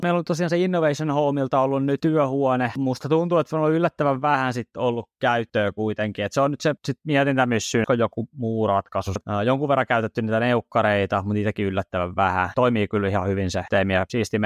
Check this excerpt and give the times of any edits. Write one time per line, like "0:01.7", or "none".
0:07.8
0:09.2

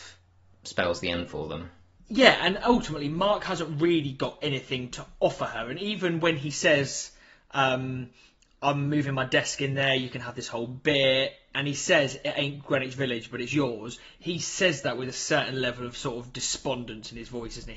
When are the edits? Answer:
none

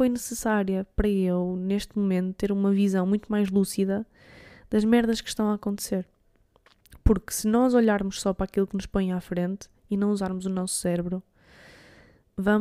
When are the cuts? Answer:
none

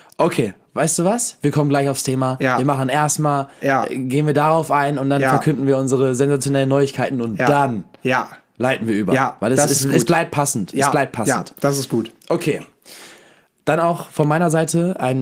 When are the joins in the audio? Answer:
none

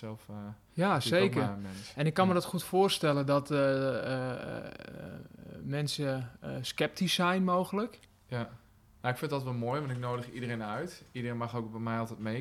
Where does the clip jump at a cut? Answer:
0:09.0

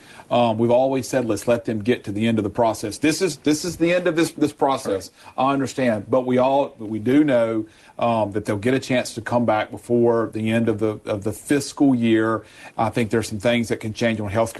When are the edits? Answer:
0:12.7

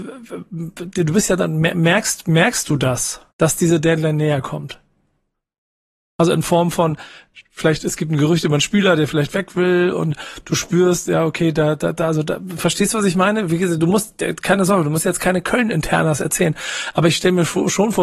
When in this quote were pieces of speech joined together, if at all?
0:03.3

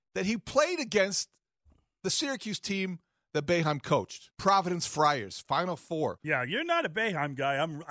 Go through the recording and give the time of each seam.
0:04.3
0:06.2

